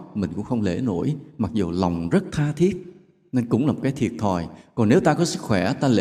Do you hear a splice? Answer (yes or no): no